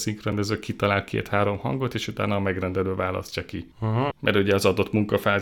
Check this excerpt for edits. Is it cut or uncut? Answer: cut